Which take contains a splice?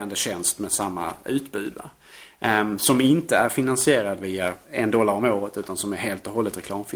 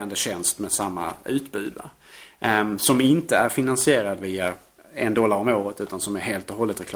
first; 1 cut; at 4.6 s

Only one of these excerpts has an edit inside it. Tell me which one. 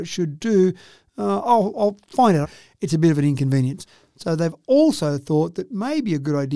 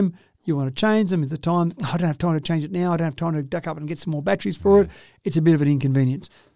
first; 1 cut; at 2.4 s

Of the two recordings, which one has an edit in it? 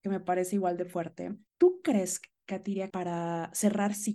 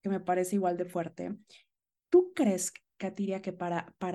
first; 2 cuts; at 1.5 s, 2.9 s

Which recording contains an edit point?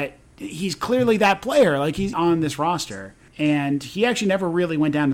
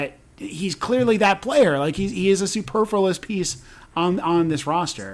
first; 2 cuts; at 2.1 s, 3.3 s

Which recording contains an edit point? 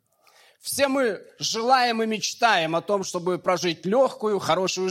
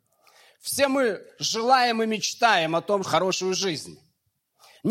second; 1 cut; at 3.0 s

